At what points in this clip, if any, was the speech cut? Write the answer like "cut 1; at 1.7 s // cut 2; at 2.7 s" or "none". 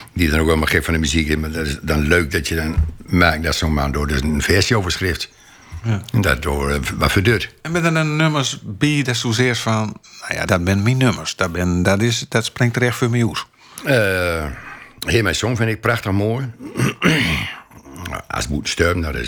cut 1; at 10.5 s // cut 2; at 11.8 s